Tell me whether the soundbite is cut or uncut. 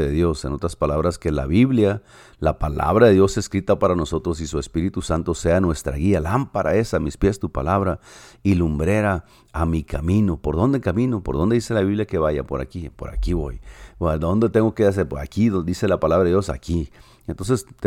uncut